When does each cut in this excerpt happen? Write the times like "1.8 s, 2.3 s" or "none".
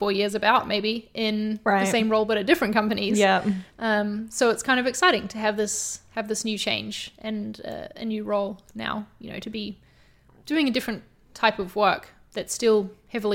none